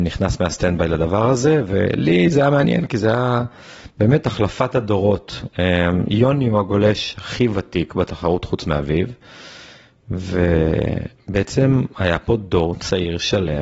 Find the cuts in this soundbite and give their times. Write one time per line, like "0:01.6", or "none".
none